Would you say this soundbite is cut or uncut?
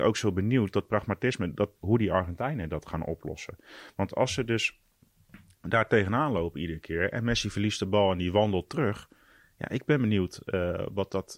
cut